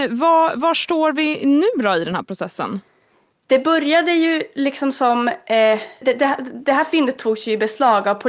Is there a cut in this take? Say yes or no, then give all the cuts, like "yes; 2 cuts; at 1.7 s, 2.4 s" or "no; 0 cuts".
yes; 1 cut; at 6.0 s